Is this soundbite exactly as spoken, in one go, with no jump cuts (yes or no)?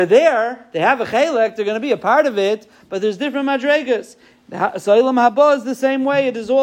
yes